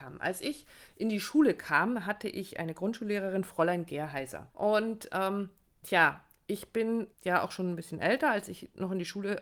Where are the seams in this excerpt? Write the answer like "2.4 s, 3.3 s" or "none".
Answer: 4.5 s, 7.1 s